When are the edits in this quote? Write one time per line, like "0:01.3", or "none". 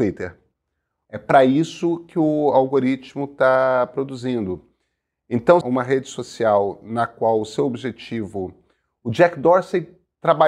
0:01.1
0:05.6